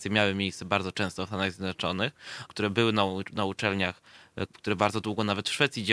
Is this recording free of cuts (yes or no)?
no